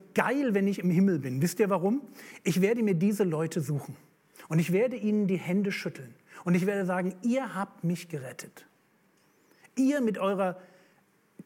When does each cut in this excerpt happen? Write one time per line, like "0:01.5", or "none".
none